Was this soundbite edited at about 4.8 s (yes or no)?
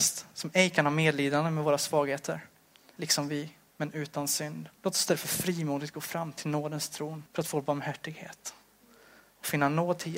yes